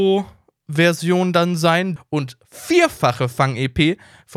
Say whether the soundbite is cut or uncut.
cut